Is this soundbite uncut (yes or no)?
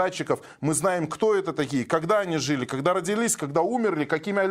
yes